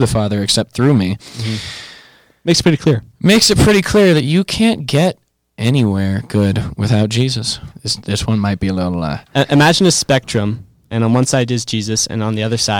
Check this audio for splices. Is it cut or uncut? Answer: cut